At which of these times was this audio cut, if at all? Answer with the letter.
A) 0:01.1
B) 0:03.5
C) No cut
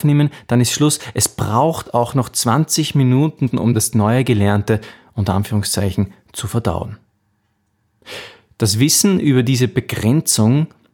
B